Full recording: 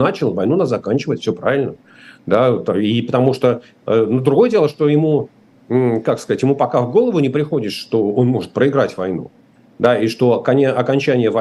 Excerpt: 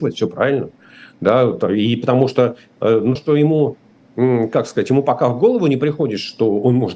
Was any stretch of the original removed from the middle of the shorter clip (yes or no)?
yes